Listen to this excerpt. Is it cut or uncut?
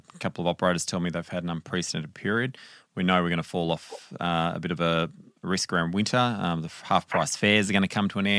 uncut